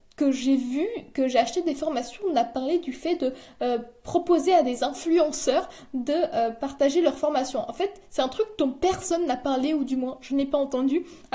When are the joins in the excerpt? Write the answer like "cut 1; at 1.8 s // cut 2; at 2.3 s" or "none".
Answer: none